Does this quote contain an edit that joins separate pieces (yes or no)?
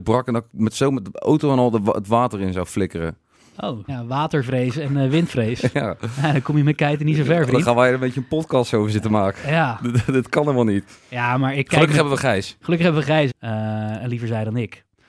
yes